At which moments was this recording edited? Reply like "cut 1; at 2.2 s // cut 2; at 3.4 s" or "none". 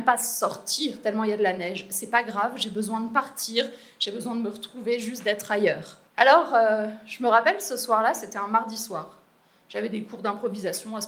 cut 1; at 6.1 s